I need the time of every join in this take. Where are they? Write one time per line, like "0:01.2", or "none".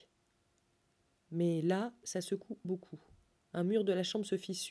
0:02.6